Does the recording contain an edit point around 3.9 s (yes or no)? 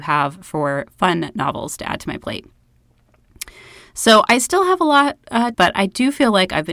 no